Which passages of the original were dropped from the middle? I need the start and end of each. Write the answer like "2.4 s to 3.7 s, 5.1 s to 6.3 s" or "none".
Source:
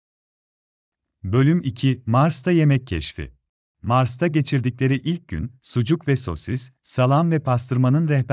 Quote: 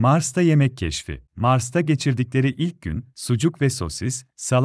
3.4 s to 3.7 s